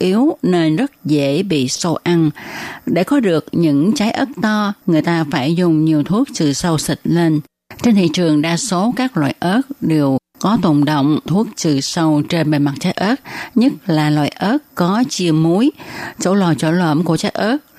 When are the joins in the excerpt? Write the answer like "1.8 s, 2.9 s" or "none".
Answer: 4.8 s